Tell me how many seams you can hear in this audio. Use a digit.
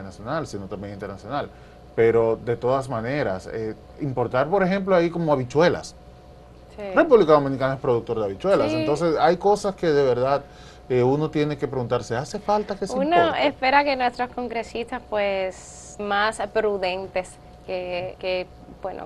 2